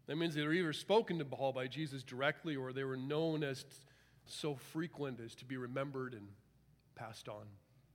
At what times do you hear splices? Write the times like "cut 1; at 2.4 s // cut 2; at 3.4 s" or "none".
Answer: cut 1; at 4.3 s